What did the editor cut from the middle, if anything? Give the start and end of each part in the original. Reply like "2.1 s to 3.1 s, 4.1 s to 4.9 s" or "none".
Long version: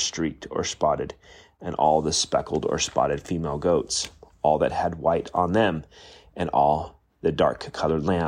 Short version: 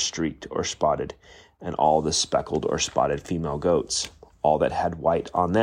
none